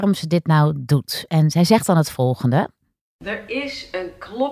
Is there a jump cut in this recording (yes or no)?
no